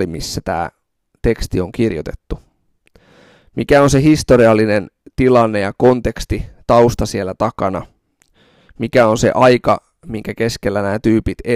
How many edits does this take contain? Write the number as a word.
zero